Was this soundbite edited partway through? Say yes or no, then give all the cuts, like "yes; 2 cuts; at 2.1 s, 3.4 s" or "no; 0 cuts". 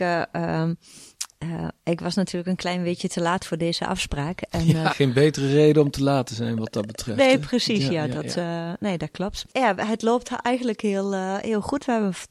yes; 1 cut; at 4.9 s